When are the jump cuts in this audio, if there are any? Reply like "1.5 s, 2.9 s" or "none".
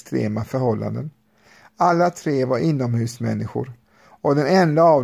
none